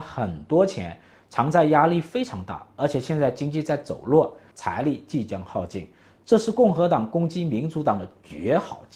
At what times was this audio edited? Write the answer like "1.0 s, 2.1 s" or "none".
4.5 s